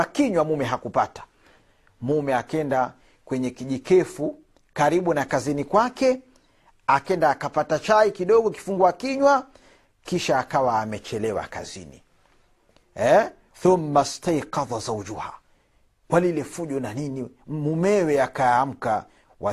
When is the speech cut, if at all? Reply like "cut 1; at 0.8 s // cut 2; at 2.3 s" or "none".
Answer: cut 1; at 13.5 s